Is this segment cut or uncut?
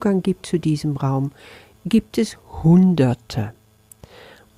uncut